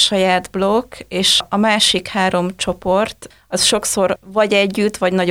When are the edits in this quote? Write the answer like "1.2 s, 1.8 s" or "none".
1.4 s